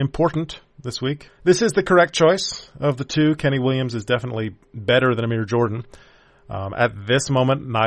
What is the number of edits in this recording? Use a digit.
1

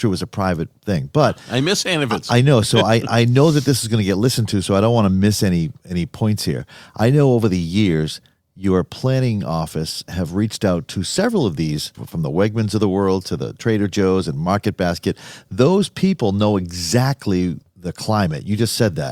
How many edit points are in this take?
2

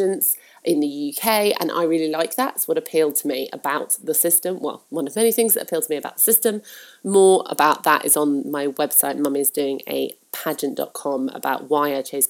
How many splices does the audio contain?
0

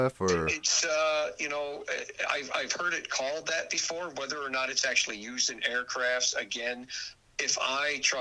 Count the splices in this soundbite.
0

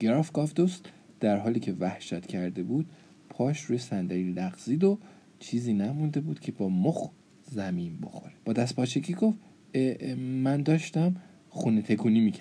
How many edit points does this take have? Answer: 2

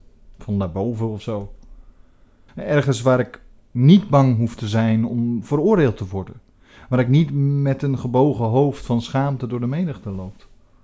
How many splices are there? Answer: 1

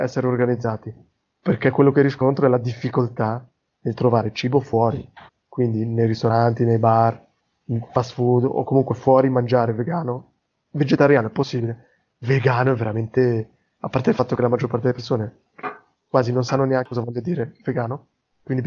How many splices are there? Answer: 0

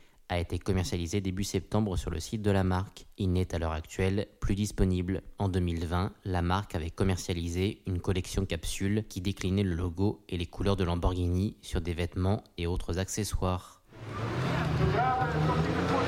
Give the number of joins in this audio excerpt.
1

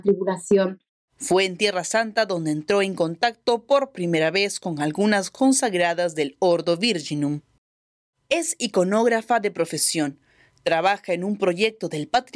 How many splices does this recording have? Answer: 1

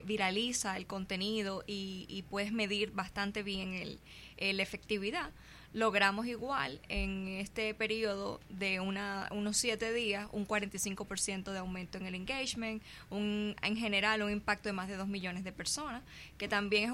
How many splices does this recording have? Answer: 0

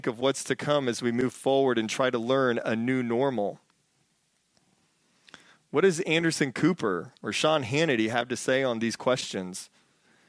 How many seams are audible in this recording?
0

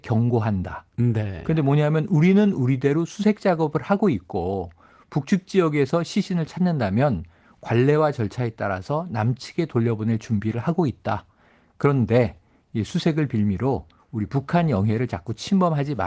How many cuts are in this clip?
1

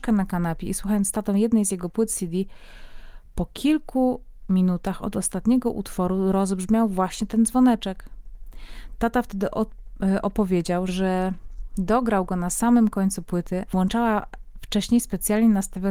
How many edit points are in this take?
2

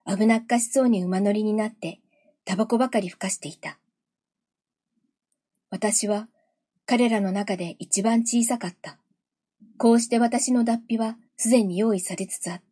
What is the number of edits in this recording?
2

